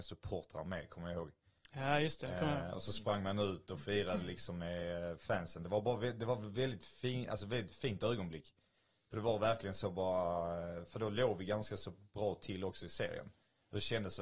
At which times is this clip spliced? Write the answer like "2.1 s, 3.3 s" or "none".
none

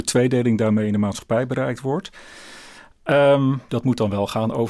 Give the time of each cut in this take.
3.7 s

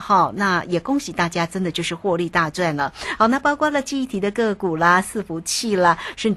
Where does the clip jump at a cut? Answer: none

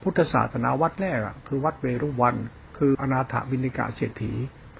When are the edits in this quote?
2.9 s

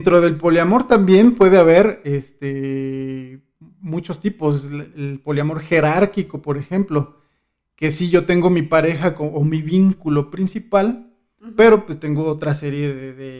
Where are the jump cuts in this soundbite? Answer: none

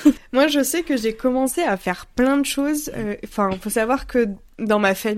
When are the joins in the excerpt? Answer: none

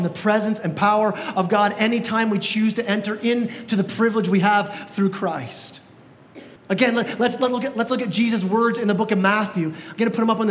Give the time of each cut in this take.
6.6 s

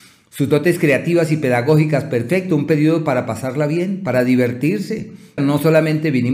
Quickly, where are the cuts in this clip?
5.4 s

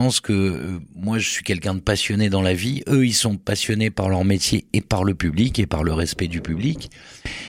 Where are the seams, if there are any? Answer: none

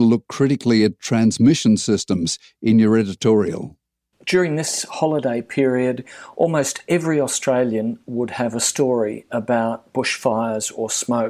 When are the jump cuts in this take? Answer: none

